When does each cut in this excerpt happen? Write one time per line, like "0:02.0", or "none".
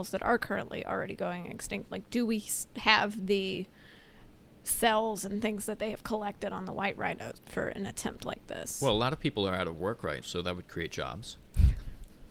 0:07.4
0:10.2